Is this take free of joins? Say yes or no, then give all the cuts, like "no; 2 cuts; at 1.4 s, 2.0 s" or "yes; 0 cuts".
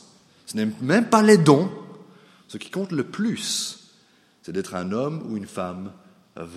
yes; 0 cuts